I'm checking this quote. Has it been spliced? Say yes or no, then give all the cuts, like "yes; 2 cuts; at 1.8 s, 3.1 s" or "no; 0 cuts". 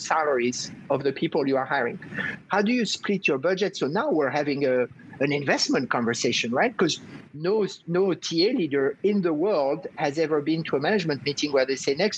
yes; 1 cut; at 2.4 s